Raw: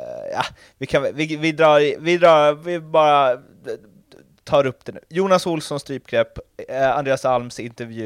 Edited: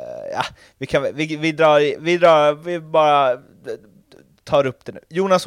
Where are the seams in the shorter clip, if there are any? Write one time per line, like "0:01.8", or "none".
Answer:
none